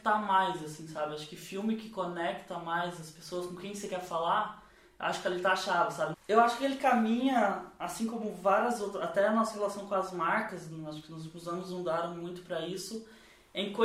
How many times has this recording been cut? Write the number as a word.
one